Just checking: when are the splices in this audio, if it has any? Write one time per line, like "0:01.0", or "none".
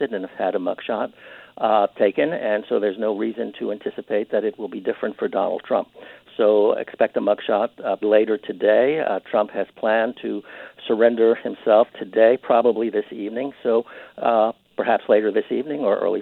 0:08.0